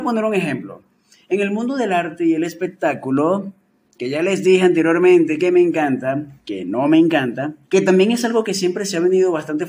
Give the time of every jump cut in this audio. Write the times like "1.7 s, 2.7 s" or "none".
6.4 s, 7.6 s